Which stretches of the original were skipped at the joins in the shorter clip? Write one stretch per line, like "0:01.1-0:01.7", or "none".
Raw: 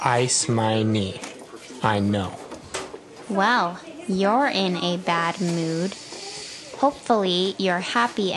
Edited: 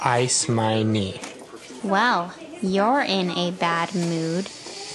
0:01.8-0:03.3